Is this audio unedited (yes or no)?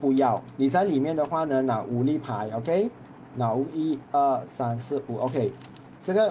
yes